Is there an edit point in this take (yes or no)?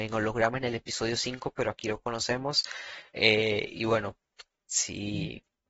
no